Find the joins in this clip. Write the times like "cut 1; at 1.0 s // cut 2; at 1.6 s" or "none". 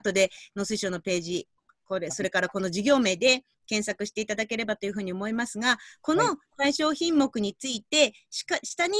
none